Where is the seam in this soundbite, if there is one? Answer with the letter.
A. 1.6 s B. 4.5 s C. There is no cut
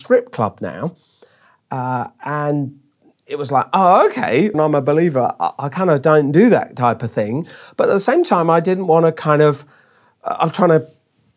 B